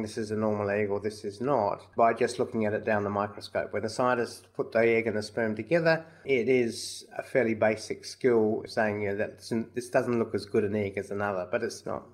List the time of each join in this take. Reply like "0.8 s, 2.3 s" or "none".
6.2 s